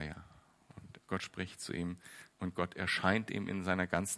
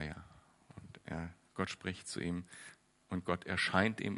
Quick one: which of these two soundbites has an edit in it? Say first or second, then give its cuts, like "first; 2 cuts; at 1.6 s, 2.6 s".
first; 2 cuts; at 1.0 s, 2.3 s